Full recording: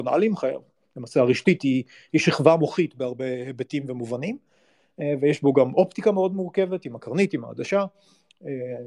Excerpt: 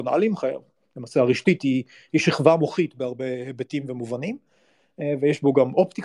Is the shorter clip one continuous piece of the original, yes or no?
yes